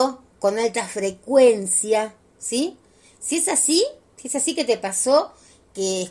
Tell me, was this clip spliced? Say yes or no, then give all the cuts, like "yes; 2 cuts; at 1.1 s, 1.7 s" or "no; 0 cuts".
no; 0 cuts